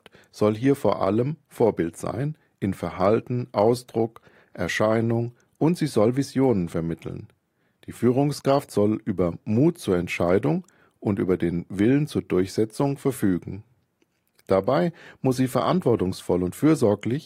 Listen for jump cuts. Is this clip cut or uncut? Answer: uncut